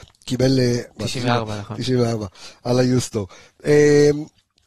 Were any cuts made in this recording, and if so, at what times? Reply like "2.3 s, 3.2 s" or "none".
1.0 s